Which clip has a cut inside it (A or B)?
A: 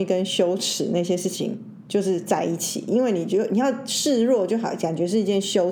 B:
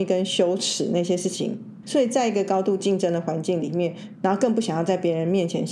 B